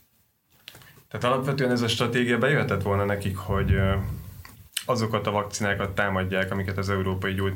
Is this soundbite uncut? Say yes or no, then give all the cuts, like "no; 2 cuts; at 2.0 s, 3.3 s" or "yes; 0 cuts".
no; 1 cut; at 1.0 s